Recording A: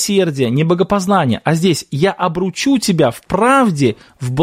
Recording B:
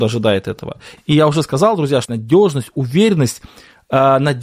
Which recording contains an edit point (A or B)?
B